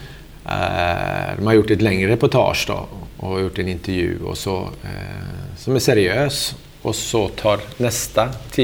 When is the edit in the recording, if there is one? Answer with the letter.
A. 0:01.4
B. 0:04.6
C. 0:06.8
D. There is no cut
D